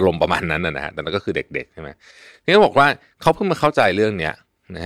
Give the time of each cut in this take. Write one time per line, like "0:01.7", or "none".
none